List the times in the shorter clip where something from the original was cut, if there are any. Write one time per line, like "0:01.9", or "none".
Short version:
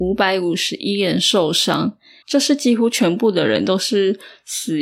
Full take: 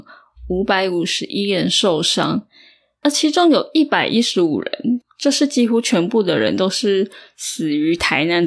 0:02.2